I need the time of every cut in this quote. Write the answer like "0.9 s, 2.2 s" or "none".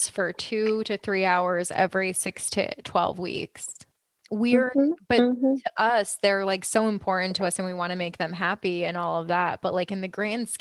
none